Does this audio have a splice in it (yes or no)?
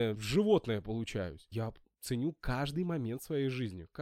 no